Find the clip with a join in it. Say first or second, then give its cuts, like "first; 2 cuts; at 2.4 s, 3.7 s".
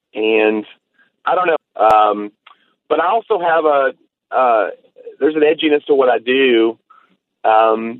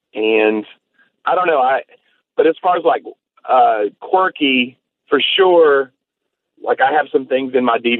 first; 1 cut; at 1.6 s